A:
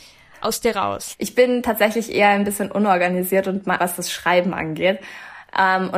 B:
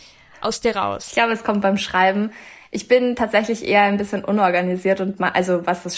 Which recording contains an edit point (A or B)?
A